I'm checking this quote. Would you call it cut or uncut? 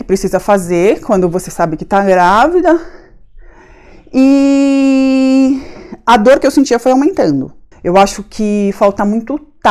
cut